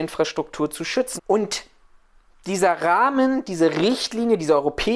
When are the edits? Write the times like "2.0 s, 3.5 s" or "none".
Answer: 1.2 s

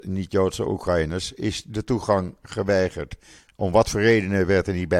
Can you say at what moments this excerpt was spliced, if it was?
none

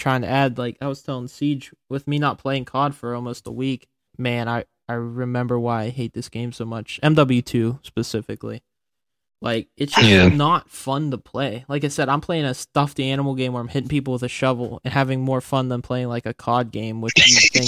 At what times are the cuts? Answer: 4.1 s

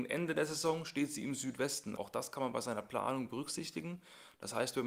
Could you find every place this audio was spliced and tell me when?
2.0 s

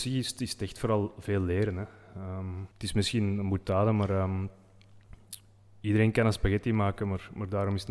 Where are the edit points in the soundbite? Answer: none

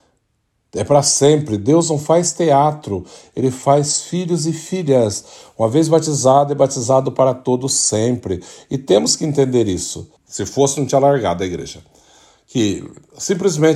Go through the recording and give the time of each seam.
10.2 s

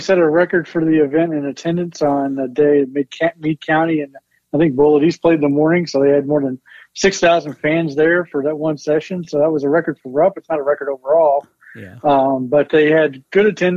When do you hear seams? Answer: none

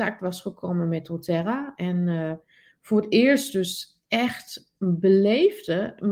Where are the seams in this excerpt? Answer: none

